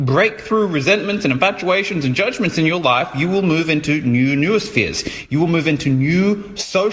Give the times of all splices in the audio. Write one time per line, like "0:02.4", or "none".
none